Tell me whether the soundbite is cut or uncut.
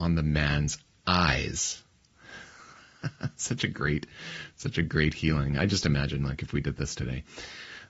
uncut